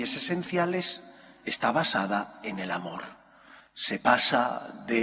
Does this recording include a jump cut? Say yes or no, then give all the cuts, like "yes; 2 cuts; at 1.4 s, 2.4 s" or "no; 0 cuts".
yes; 1 cut; at 3.6 s